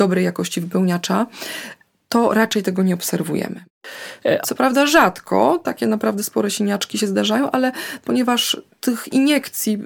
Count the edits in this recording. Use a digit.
1